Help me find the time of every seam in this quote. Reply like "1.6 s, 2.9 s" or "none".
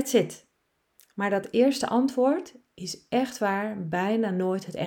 none